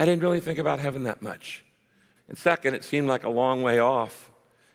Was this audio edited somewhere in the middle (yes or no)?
yes